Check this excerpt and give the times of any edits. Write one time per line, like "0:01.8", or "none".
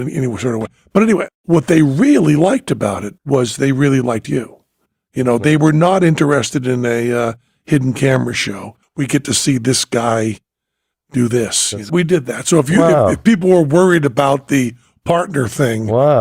0:08.8
0:11.9